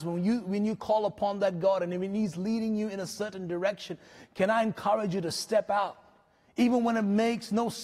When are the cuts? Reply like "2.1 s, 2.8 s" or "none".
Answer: none